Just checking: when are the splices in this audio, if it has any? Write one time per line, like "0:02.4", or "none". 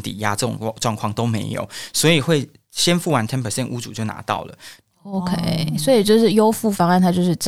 0:04.8